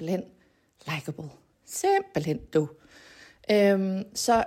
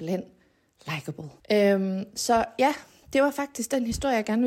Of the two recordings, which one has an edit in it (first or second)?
second